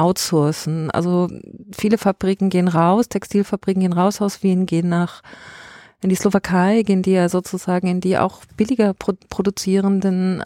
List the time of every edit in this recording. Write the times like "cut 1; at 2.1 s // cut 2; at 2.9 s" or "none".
none